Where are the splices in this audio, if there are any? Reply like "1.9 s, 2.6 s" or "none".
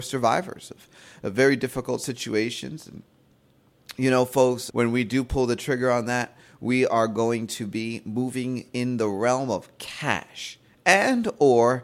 4.7 s